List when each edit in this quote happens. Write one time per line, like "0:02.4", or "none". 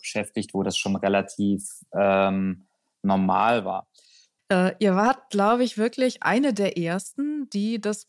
0:04.4

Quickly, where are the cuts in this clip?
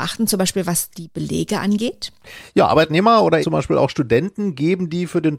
0:03.4

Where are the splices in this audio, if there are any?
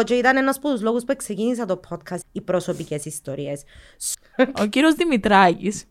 0:02.2
0:04.1

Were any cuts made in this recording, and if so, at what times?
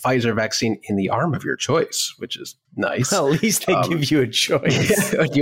0:02.6

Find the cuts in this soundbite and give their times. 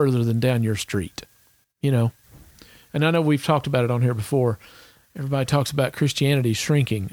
0:01.6

